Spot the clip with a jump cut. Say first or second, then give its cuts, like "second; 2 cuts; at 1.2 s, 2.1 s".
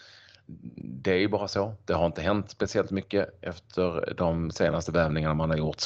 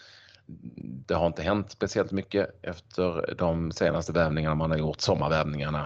second; 1 cut; at 1.0 s